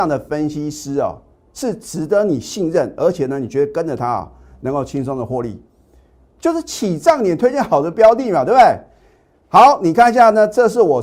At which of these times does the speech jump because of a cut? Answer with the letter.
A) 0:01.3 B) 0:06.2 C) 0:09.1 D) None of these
D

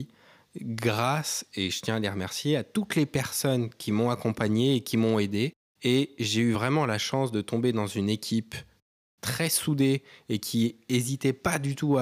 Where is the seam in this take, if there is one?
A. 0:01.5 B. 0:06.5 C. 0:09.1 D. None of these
D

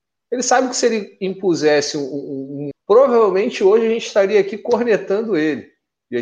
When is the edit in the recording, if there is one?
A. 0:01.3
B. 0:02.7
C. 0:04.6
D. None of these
B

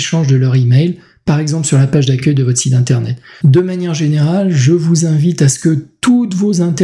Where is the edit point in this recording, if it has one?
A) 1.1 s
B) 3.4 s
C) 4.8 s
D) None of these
B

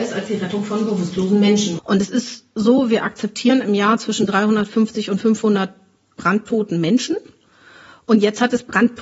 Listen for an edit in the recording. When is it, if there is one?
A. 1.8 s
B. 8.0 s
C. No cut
A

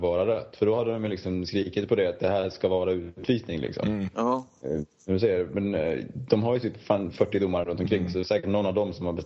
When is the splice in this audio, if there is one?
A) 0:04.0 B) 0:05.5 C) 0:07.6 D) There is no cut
C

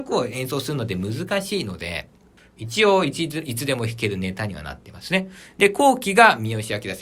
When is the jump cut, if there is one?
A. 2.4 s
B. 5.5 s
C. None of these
A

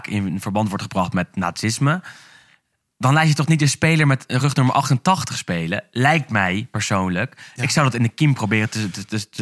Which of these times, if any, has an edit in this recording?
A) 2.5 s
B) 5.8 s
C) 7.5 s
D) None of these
D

